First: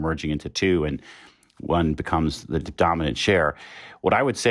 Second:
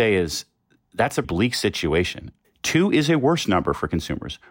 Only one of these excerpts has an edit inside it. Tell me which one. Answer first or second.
second